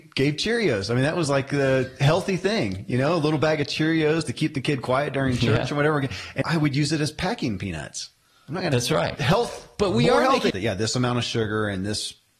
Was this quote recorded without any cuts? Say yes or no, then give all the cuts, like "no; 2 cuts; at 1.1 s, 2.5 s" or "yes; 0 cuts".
no; 3 cuts; at 6.4 s, 9.2 s, 10.5 s